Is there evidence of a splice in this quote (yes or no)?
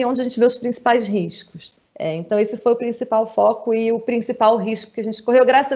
yes